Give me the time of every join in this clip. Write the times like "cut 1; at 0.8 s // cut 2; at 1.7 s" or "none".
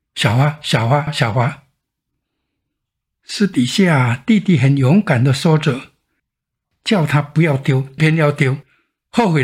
cut 1; at 1.1 s // cut 2; at 8.0 s